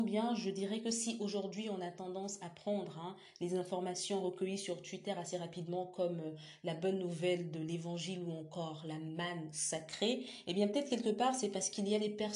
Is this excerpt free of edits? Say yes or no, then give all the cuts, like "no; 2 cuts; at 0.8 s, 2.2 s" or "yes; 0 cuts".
yes; 0 cuts